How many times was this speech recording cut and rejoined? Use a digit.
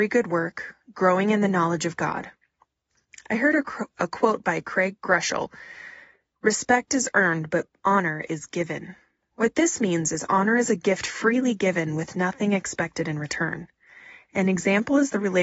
0